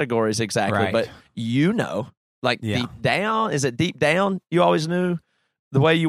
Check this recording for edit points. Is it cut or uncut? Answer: uncut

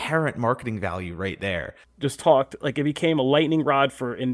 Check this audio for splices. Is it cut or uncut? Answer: cut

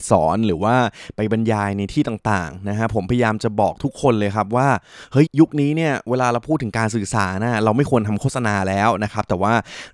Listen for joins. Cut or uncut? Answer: cut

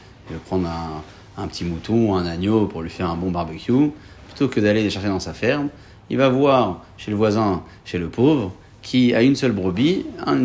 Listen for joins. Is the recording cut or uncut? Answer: uncut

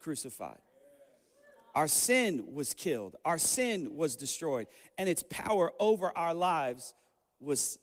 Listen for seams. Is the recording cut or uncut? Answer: uncut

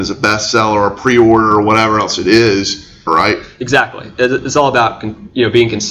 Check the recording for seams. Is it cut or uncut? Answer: cut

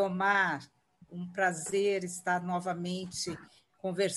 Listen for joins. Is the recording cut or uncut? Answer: cut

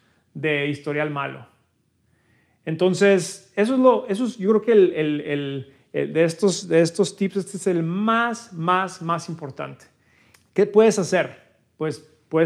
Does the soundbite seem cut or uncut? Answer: uncut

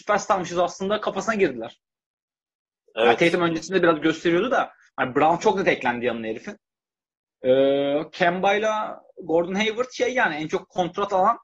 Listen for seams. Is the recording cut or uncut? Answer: uncut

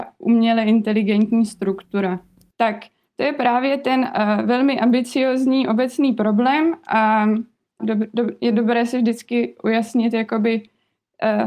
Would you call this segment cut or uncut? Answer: cut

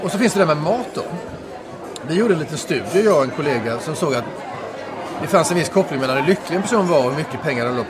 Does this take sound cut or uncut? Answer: cut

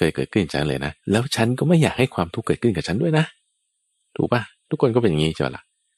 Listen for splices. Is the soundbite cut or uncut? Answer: cut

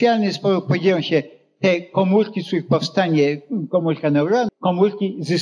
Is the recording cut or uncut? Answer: cut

